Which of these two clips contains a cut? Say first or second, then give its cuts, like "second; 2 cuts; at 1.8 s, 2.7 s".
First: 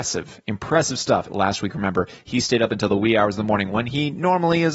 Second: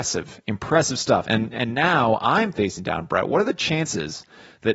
first; 1 cut; at 1.3 s